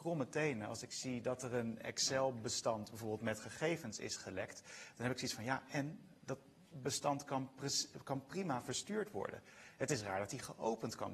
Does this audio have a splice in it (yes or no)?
no